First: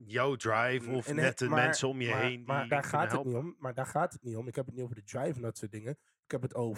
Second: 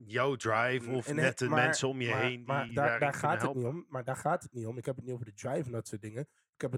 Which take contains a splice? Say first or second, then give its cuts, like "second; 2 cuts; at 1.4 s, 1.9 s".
first; 1 cut; at 2.7 s